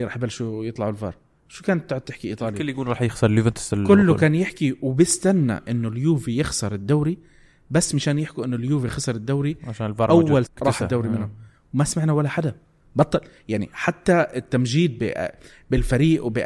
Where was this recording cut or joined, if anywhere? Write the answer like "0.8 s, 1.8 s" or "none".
10.4 s